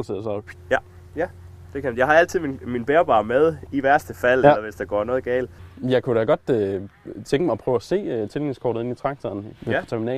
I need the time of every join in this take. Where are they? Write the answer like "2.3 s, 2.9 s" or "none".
3.7 s

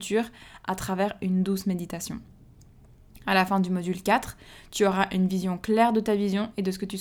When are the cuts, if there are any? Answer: none

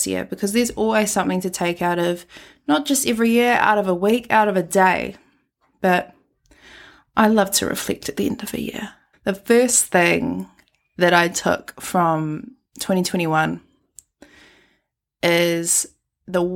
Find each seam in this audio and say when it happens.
9.1 s

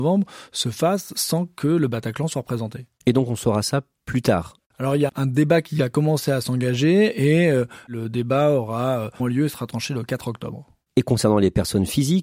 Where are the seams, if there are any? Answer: 5.1 s, 9.2 s

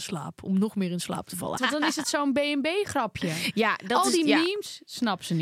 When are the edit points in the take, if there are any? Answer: 1.6 s

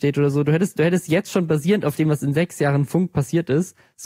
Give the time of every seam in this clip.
none

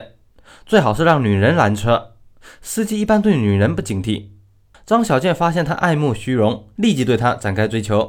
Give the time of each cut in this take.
4.7 s

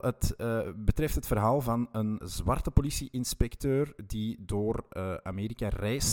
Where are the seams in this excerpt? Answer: 2.2 s

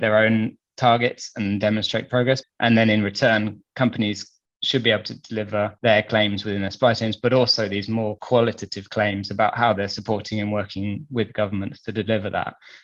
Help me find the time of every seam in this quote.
2.4 s

